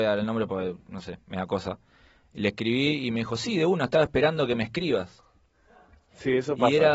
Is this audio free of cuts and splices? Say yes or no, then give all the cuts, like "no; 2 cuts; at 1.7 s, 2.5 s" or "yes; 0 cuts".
yes; 0 cuts